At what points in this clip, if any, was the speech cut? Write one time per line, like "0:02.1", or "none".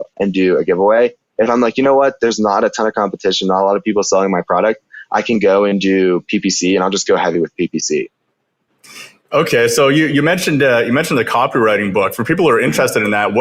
none